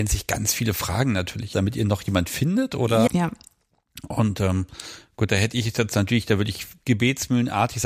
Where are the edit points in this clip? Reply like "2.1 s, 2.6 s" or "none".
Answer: 1.5 s, 3.1 s